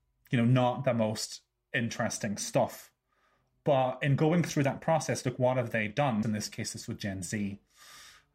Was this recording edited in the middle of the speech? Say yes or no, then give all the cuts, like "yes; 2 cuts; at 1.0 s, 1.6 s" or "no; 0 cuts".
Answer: yes; 1 cut; at 6.2 s